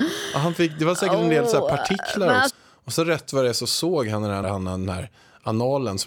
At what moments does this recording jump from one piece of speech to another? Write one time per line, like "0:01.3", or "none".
0:02.5
0:04.4